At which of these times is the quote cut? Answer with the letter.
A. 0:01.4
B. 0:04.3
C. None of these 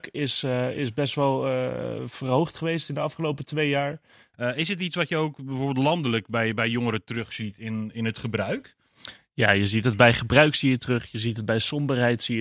B